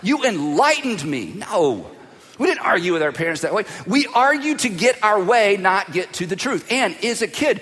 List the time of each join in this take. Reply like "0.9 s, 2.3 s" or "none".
none

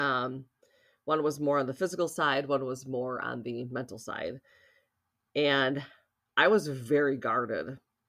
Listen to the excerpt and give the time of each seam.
none

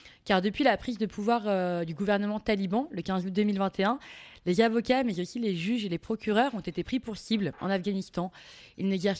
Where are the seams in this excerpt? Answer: none

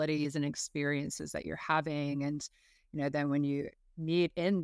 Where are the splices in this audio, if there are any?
none

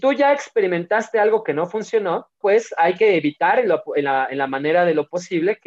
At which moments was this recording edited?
2.4 s

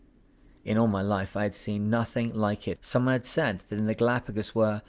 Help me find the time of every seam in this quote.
2.8 s

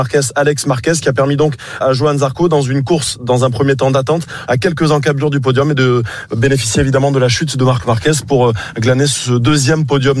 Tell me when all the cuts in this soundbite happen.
1.8 s, 4.5 s

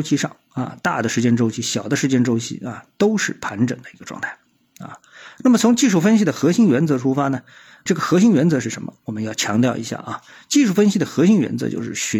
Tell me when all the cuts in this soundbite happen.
none

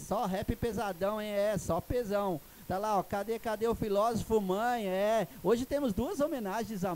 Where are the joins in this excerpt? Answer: 2.7 s

